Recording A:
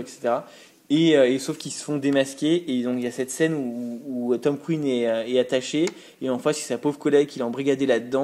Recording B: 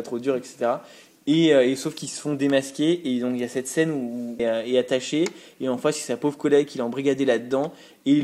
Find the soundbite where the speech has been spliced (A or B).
B